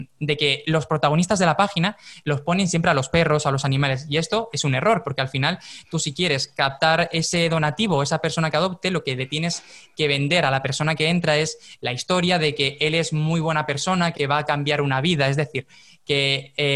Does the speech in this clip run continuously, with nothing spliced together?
no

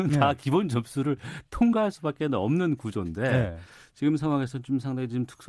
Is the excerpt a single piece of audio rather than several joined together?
yes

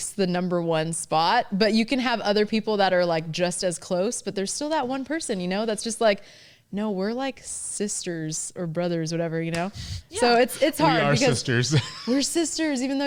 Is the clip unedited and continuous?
yes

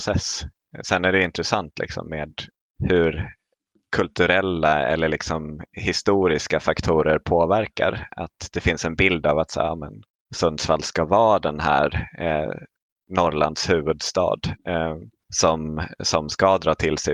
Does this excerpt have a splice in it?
no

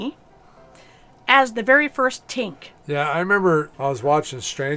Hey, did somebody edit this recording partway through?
yes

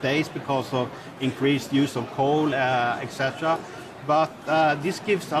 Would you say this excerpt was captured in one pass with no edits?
yes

